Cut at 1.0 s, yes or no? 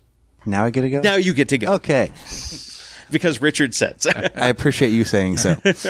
no